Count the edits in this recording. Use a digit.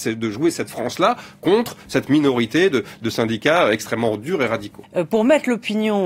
1